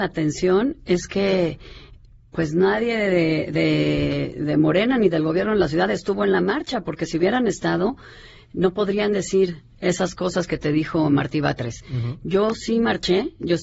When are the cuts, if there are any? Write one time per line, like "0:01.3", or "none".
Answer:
none